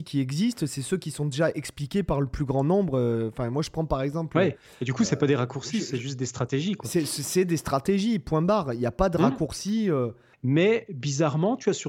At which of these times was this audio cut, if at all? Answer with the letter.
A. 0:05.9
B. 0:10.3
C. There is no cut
B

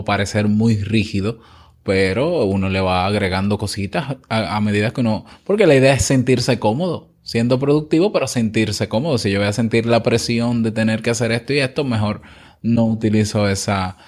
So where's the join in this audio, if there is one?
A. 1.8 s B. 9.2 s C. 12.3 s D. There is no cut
D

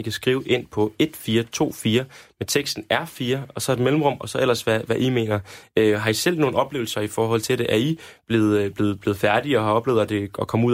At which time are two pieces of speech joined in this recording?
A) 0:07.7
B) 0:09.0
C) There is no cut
B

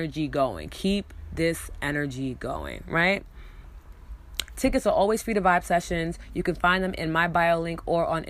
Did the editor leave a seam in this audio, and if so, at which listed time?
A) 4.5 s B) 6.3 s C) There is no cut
A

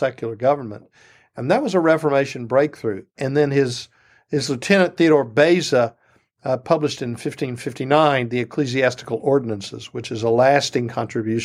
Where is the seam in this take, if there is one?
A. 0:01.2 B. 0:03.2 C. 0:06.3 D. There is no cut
B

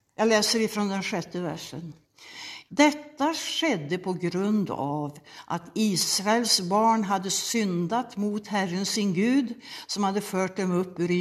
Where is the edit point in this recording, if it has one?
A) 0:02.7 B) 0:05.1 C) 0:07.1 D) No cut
A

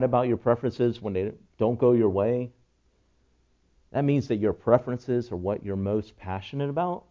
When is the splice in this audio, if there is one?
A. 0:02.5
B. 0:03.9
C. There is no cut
C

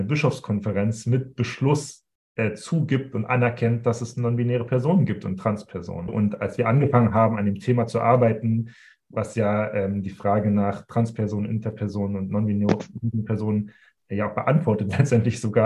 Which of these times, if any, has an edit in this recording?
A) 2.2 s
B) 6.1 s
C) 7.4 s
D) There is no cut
B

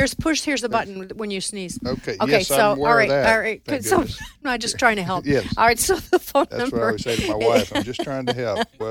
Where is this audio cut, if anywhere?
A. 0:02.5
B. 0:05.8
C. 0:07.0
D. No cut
D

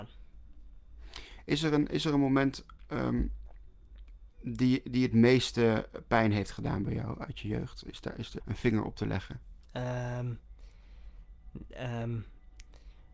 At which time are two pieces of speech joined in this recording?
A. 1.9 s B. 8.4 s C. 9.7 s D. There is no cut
B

